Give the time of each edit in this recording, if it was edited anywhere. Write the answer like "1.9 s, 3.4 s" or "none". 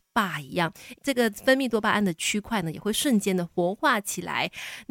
0.9 s